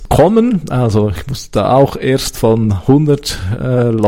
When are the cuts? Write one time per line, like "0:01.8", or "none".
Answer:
none